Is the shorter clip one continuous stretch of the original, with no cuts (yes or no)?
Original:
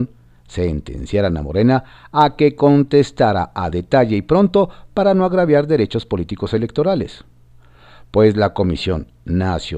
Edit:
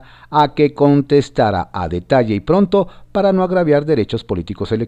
yes